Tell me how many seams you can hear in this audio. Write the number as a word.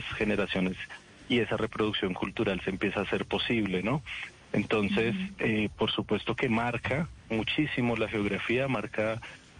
zero